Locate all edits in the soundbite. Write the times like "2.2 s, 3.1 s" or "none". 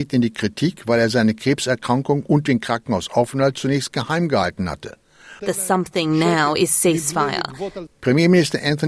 5.4 s, 7.9 s